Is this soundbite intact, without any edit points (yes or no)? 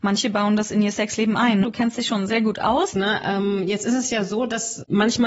no